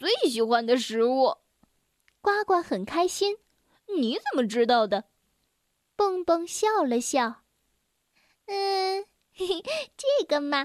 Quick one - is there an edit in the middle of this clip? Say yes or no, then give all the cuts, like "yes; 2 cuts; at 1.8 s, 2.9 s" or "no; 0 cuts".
no; 0 cuts